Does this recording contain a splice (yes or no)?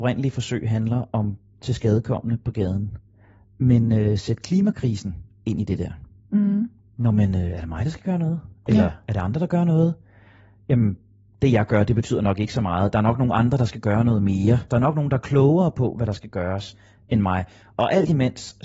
yes